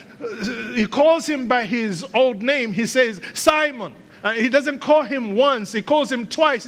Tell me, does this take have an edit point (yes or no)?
no